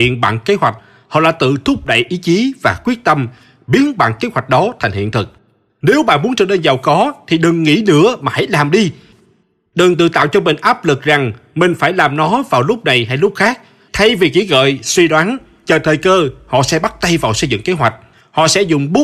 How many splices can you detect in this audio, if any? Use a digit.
1